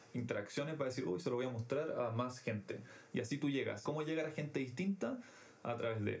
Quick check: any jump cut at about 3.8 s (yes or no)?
yes